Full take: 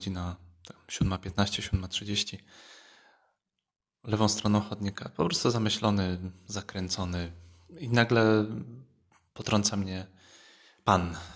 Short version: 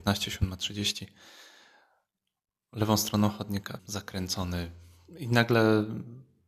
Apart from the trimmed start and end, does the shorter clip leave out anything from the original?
yes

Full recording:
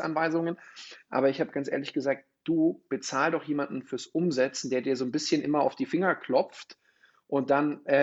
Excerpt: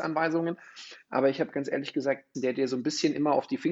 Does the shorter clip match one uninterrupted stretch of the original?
no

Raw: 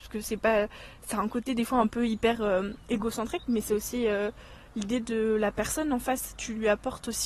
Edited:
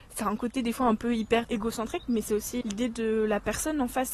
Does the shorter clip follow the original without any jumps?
no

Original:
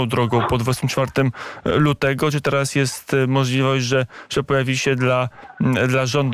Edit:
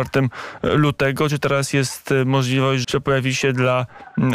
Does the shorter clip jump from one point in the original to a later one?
yes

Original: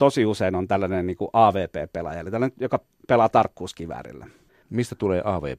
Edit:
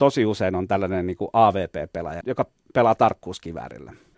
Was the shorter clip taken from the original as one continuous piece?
no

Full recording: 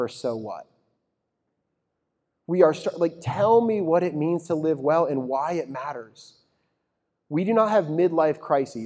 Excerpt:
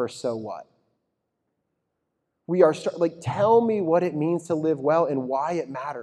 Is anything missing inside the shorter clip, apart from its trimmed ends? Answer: no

